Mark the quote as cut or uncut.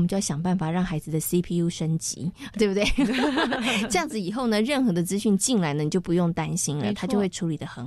uncut